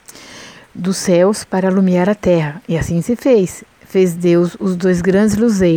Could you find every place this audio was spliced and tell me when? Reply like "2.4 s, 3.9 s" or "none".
none